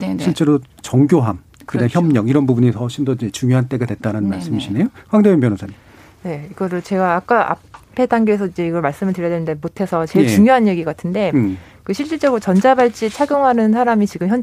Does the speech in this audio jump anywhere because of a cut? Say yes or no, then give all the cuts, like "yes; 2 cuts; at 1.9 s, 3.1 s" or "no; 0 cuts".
no; 0 cuts